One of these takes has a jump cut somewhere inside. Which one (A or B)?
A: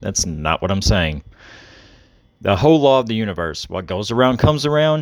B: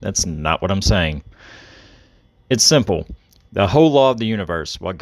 A